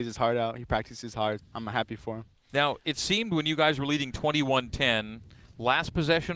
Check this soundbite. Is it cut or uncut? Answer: cut